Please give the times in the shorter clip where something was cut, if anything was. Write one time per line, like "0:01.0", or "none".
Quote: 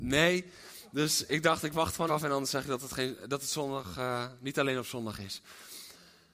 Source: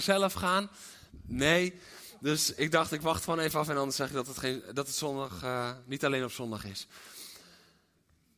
0:02.1